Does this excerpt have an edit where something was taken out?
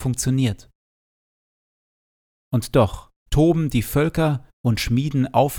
yes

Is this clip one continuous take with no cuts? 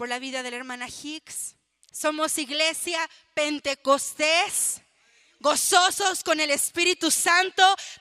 no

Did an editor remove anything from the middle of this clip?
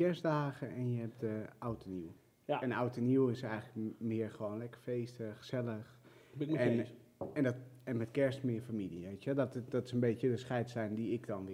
no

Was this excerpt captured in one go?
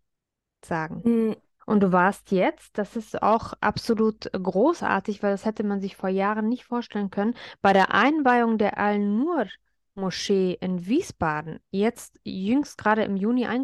no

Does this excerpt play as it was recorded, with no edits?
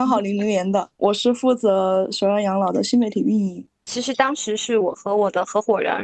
no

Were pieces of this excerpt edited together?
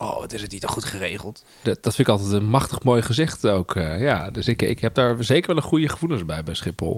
yes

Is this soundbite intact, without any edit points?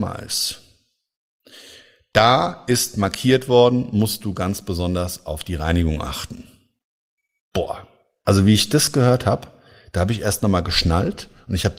yes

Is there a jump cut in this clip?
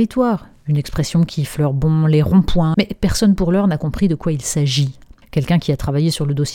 yes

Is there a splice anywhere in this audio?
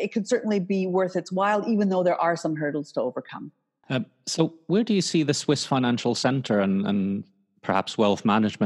yes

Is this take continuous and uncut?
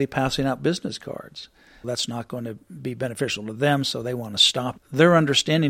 no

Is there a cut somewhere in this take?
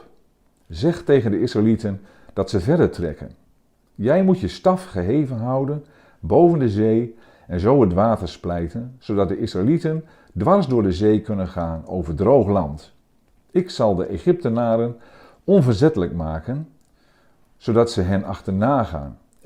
no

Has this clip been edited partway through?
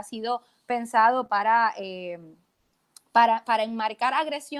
no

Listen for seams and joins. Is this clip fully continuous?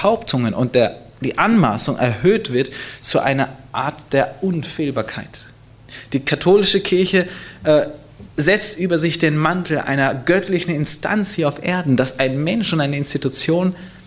yes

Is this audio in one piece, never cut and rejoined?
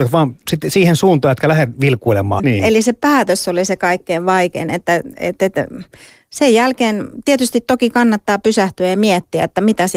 no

